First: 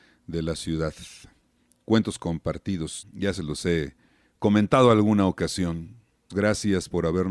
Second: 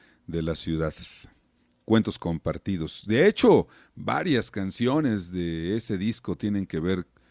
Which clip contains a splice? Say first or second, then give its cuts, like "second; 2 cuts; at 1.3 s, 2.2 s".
first; 2 cuts; at 3.0 s, 6.3 s